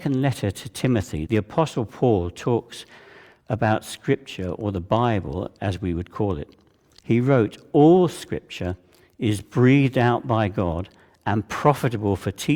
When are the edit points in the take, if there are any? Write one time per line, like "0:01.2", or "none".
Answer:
0:01.3